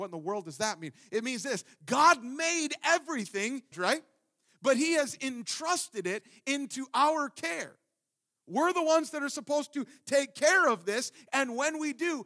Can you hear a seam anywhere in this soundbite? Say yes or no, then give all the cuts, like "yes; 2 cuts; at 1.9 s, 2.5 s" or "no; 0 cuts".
yes; 1 cut; at 3.7 s